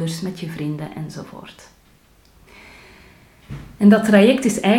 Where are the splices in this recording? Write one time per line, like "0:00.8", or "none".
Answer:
none